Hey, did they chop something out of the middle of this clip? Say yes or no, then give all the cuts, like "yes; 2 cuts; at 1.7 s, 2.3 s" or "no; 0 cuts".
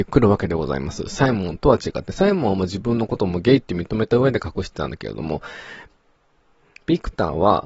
no; 0 cuts